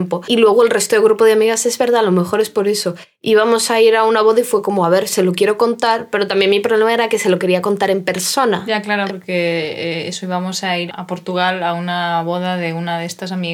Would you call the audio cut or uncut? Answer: cut